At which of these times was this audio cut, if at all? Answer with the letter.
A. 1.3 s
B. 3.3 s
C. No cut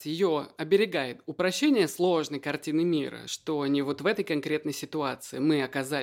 C